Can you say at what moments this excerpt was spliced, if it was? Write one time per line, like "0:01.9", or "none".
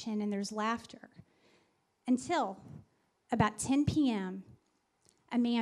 none

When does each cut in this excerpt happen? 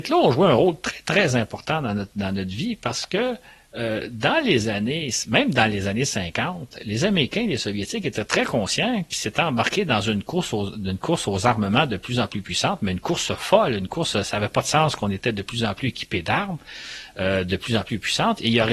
none

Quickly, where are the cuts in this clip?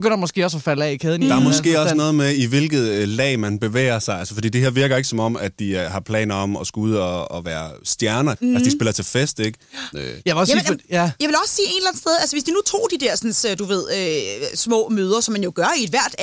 0:08.4
0:09.9

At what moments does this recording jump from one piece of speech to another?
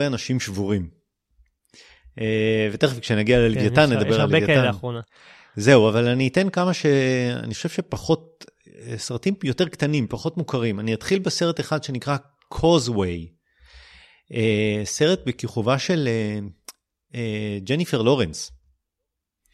none

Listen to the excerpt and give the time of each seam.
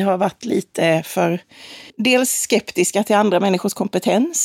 0:01.9

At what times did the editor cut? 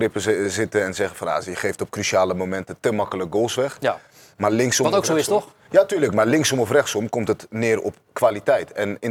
none

